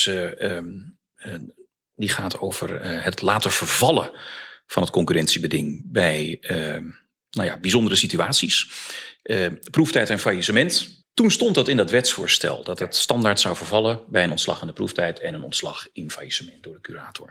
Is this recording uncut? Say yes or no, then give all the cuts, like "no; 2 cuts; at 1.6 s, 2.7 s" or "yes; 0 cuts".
no; 2 cuts; at 1.1 s, 11.0 s